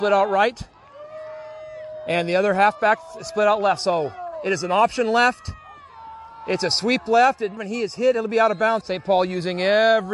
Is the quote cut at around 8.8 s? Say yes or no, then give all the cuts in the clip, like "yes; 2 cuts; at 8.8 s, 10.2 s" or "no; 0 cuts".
yes; 2 cuts; at 7.6 s, 8.8 s